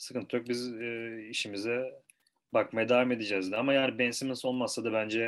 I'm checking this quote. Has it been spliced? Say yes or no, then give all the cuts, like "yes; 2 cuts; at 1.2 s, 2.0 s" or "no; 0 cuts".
no; 0 cuts